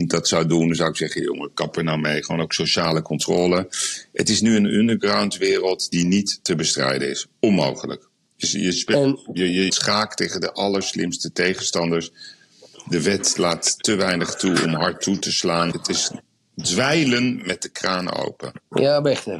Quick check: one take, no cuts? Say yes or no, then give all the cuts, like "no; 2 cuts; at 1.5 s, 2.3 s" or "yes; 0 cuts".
no; 2 cuts; at 9.7 s, 15.7 s